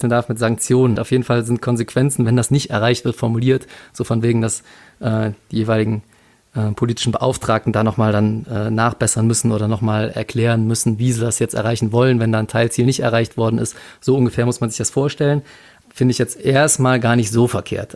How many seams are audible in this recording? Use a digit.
2